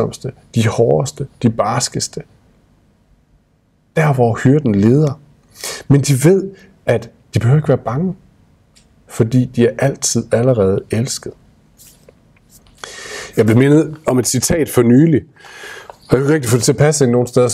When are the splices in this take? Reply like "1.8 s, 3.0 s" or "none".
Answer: none

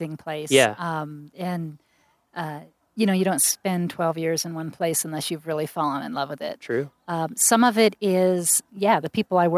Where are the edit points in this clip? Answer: 8.7 s

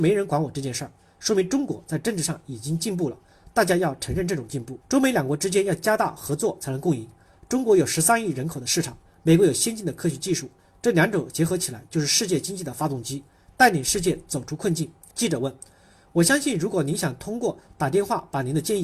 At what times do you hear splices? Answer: 4.8 s, 15.1 s

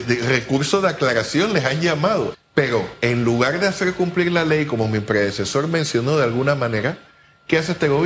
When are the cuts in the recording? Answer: 2.3 s

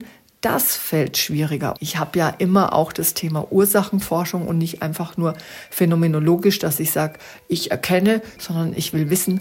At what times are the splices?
1.8 s, 8.4 s

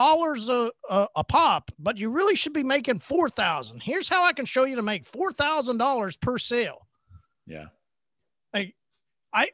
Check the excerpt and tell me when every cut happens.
none

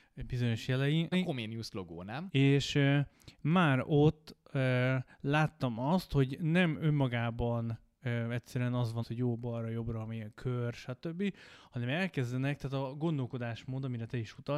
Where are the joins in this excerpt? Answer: 1.1 s, 2.3 s, 9.0 s

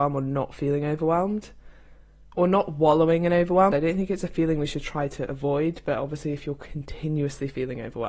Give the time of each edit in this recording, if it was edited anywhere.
3.7 s

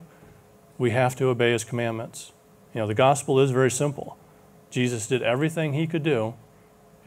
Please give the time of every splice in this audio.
2.7 s

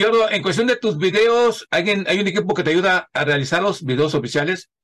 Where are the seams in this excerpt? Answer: 1.7 s

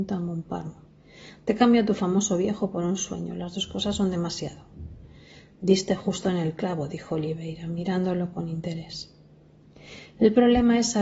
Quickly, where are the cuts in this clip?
none

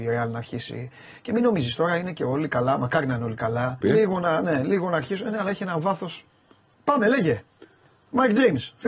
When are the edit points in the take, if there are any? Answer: 3.8 s, 6.7 s

